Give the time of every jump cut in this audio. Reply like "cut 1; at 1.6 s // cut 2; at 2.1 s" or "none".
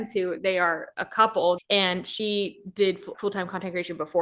cut 1; at 1.6 s // cut 2; at 3.1 s